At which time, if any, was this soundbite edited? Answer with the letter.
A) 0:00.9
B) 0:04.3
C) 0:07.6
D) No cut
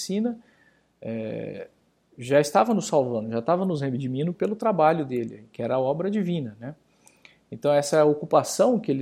B